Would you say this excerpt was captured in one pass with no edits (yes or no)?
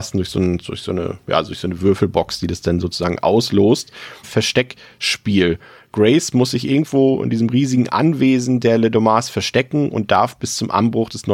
no